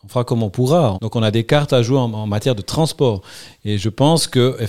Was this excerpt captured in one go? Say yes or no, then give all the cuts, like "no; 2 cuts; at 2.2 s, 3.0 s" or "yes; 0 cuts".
no; 1 cut; at 0.9 s